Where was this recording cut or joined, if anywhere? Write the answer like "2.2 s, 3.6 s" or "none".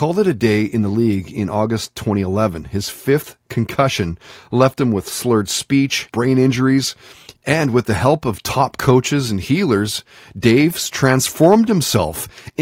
6.1 s, 7.3 s